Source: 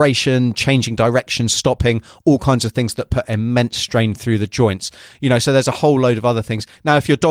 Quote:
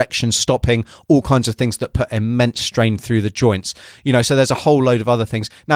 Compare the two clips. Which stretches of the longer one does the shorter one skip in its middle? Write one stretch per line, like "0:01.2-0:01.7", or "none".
none